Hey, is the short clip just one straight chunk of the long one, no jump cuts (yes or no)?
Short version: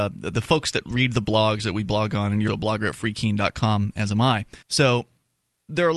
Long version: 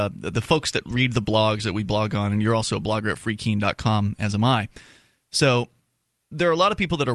no